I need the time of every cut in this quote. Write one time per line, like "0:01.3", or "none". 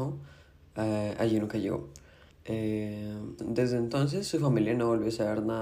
0:02.3
0:03.4